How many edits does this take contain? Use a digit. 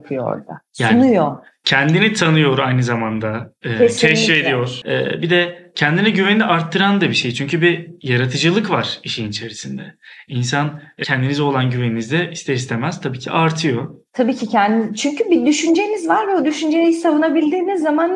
2